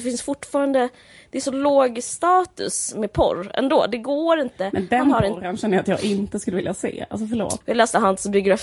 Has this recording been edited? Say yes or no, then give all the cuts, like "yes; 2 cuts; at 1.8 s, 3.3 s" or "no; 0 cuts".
yes; 1 cut; at 7.6 s